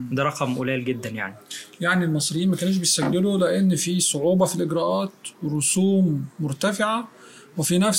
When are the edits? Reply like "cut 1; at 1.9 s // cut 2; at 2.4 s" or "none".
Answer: none